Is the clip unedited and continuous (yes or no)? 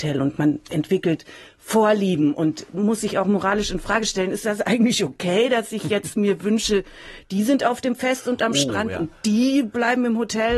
yes